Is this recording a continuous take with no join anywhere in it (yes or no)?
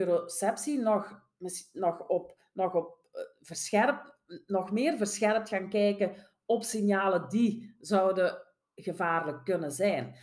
yes